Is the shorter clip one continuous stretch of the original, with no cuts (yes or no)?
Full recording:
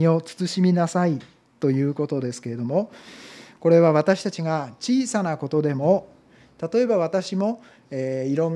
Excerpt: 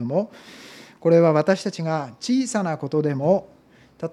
yes